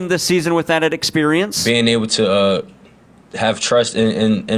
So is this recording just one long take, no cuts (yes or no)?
yes